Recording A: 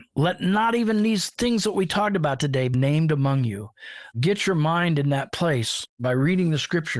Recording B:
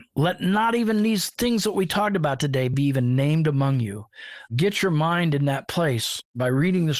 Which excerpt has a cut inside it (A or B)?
A